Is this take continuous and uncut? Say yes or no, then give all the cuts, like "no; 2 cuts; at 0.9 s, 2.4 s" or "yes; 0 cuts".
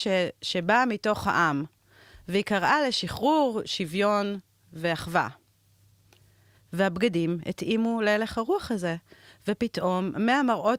yes; 0 cuts